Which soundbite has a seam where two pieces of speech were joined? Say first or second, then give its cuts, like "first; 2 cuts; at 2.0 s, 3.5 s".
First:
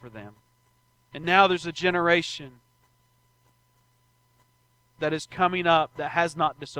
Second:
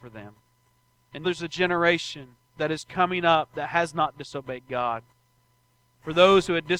second; 2 cuts; at 1.2 s, 2.5 s